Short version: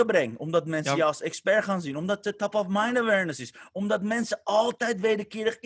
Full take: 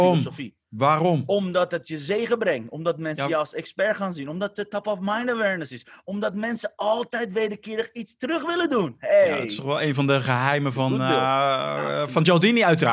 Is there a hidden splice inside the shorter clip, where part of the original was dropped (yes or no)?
no